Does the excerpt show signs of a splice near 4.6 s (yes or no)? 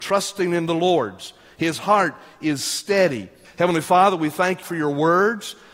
yes